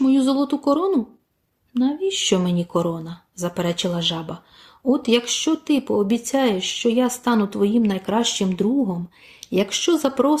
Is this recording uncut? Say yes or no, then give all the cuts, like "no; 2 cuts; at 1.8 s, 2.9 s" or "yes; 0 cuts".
yes; 0 cuts